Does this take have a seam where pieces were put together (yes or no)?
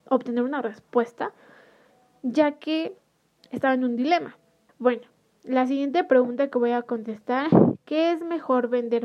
yes